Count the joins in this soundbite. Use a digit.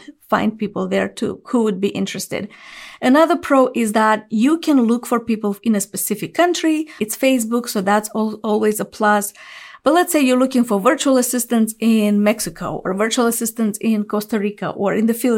1